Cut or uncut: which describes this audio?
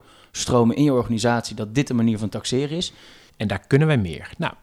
cut